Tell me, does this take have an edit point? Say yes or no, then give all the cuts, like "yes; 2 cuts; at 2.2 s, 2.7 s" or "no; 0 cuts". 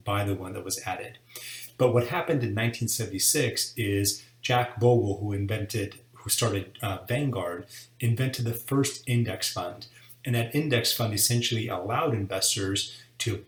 no; 0 cuts